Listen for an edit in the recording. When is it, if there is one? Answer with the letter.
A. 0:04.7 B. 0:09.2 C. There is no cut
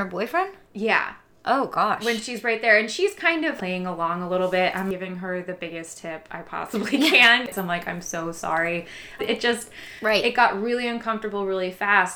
B